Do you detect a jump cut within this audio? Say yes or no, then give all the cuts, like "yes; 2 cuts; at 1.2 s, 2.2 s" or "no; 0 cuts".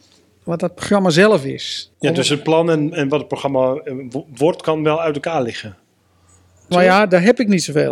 yes; 2 cuts; at 1.9 s, 6.7 s